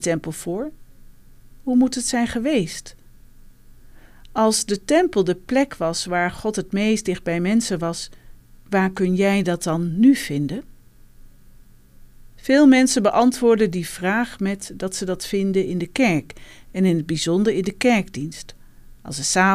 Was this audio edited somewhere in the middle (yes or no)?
no